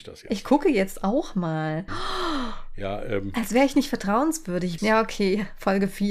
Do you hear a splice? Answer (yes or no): yes